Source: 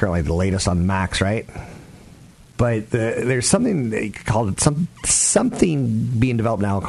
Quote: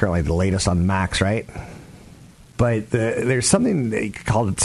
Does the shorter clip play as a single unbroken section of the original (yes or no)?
yes